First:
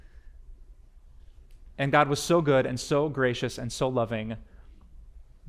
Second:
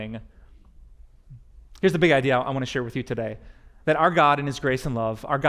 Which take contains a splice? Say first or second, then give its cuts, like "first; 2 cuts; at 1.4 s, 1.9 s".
first; 1 cut; at 1.7 s